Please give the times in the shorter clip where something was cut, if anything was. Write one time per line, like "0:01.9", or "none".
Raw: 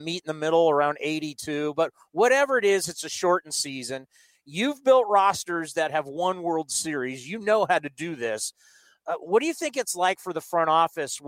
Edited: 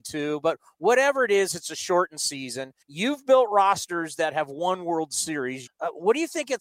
0:02.8
0:05.7